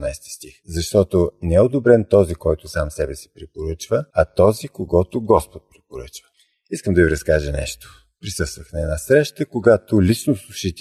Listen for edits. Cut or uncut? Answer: uncut